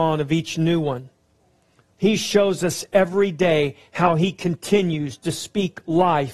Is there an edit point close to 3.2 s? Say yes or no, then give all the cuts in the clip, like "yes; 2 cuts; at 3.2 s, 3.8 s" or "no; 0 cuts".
no; 1 cut; at 1.9 s